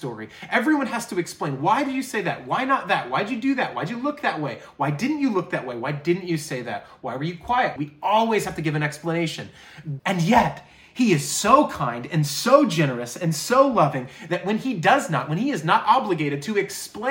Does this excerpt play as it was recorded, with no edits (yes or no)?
no